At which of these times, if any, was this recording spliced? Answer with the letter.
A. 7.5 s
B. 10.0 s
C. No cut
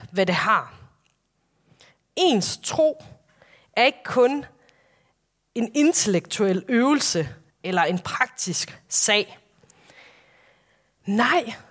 A